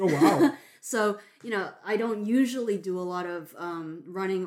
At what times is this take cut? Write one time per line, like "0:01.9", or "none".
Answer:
none